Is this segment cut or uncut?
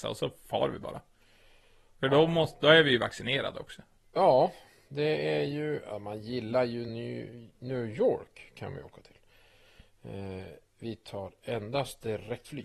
uncut